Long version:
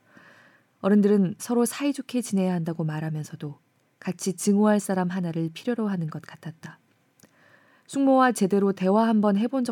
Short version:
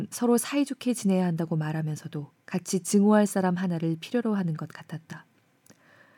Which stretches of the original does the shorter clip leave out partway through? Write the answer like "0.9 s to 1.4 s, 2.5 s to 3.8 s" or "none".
3.7 s to 3.9 s